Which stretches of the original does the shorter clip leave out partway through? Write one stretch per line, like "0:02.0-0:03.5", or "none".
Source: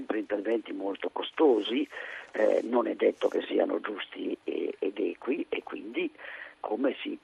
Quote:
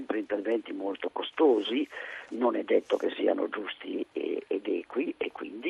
0:02.3-0:02.6